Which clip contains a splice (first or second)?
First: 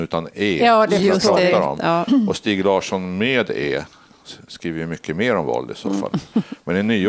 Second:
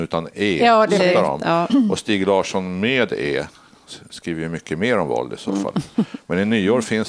second